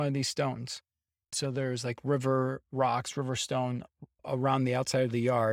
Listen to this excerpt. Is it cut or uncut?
cut